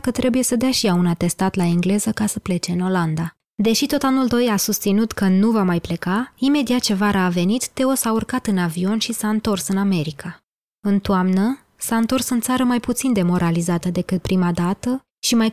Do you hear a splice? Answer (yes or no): yes